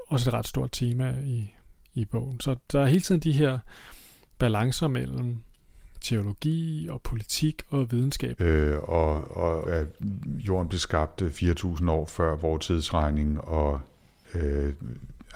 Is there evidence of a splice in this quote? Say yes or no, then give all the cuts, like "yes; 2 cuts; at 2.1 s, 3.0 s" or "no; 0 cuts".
yes; 2 cuts; at 8.4 s, 9.6 s